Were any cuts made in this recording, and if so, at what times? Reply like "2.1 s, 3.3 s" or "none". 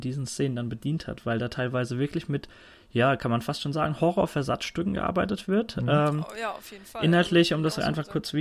none